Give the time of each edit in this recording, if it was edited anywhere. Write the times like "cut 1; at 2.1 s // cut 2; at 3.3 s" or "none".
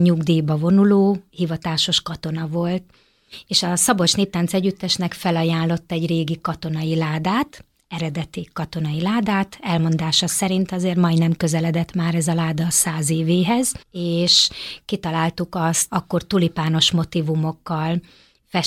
cut 1; at 13.8 s // cut 2; at 15.9 s